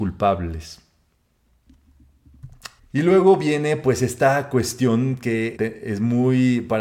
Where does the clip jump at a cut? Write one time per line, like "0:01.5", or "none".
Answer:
0:02.8
0:05.6